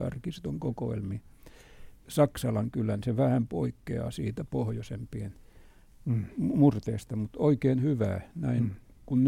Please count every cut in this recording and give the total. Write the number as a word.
one